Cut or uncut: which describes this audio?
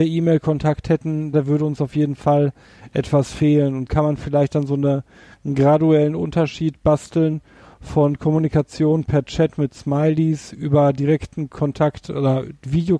cut